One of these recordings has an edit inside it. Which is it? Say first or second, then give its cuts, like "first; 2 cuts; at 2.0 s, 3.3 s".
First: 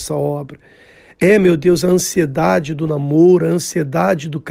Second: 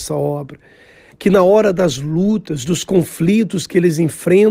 second; 1 cut; at 1.1 s